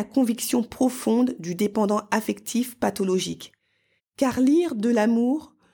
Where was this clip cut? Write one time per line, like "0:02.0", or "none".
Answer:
0:04.0